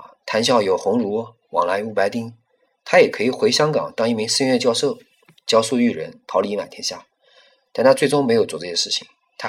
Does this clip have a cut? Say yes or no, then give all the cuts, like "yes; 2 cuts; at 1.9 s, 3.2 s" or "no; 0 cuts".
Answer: no; 0 cuts